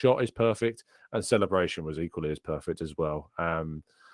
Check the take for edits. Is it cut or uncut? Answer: uncut